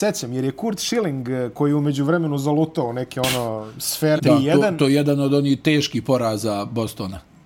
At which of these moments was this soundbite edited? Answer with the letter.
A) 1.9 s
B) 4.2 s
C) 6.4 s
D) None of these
B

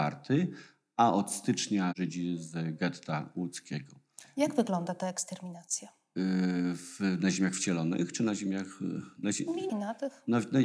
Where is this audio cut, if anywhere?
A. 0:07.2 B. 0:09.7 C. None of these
B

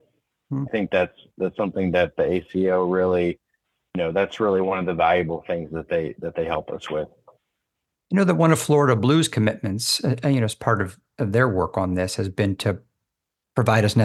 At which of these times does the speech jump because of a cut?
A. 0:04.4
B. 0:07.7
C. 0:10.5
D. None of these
D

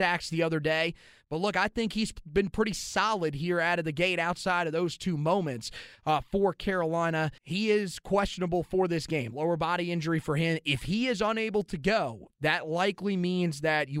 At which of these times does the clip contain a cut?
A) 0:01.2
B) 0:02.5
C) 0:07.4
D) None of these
C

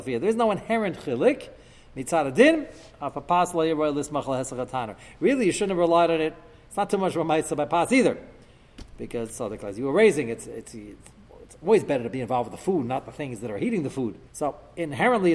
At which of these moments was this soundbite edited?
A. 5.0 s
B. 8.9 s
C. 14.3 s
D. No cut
C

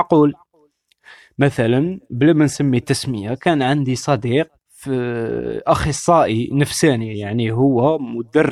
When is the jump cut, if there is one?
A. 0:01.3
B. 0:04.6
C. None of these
B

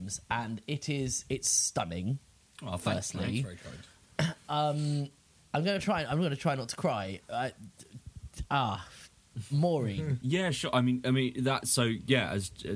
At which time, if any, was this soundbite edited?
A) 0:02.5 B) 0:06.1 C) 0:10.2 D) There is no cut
C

